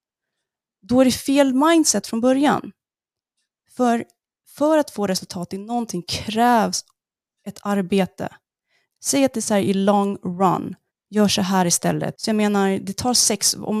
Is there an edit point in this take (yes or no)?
yes